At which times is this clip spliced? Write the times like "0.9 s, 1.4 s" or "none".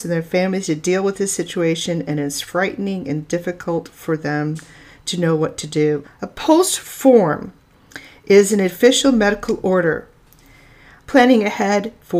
6.0 s, 11.0 s